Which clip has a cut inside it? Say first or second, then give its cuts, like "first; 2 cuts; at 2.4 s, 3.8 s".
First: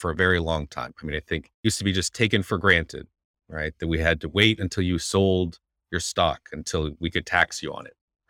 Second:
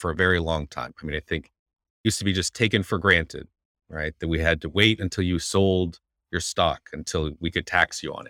first; 1 cut; at 1.5 s